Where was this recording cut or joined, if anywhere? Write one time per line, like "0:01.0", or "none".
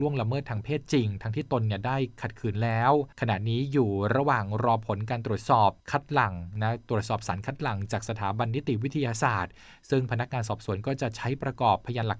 0:03.1
0:05.8

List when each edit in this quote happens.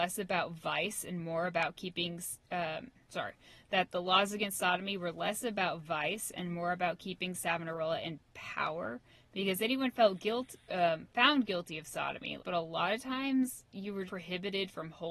0:03.1
0:12.4
0:14.1

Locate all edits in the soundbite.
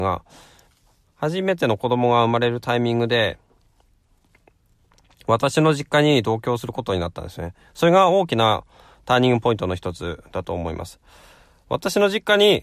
none

